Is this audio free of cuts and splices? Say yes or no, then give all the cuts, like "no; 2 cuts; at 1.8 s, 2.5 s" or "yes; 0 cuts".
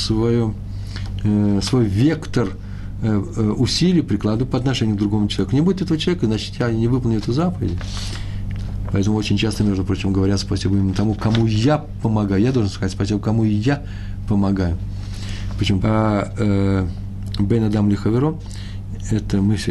no; 1 cut; at 15.8 s